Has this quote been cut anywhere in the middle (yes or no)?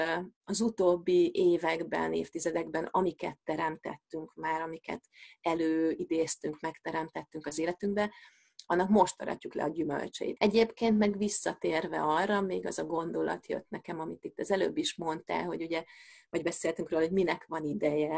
yes